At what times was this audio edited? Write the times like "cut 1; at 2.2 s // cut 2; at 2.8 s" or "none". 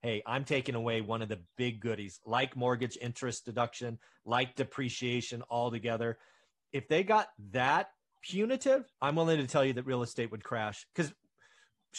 cut 1; at 8.9 s